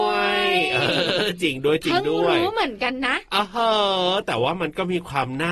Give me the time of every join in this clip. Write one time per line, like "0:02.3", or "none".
none